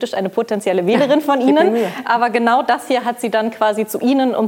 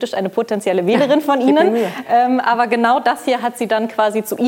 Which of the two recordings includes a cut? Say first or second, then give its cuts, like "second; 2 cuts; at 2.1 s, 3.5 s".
first; 1 cut; at 2.0 s